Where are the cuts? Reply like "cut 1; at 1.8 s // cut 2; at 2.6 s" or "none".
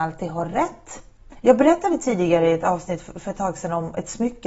cut 1; at 1.4 s